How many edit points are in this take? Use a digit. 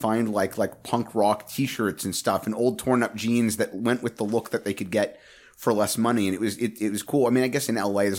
0